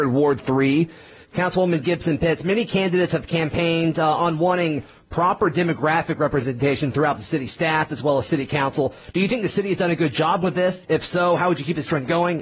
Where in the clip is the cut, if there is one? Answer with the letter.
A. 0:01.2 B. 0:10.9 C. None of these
A